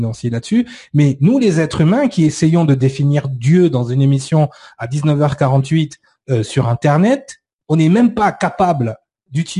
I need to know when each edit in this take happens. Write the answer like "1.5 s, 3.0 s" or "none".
none